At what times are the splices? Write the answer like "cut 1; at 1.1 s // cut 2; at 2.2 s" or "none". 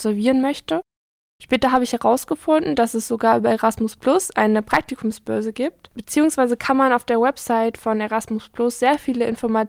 cut 1; at 1.3 s